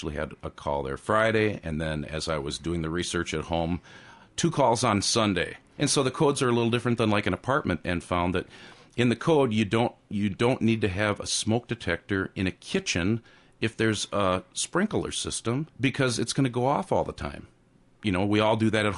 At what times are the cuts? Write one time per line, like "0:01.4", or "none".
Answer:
0:05.8
0:07.8
0:15.7